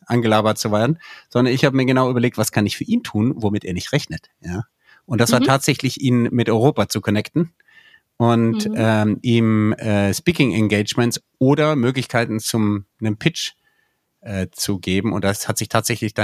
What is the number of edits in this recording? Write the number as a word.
zero